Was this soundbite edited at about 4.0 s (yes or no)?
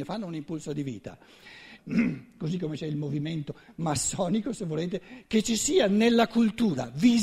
no